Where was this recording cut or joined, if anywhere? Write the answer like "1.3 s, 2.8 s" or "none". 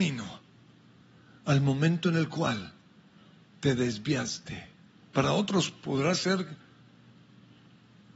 5.0 s